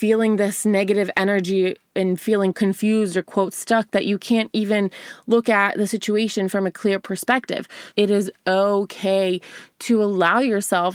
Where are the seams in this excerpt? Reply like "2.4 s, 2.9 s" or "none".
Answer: 2.5 s, 7.9 s